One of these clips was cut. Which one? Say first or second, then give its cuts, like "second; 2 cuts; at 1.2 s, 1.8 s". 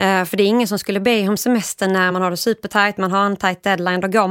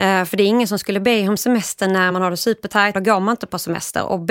second; 1 cut; at 2.9 s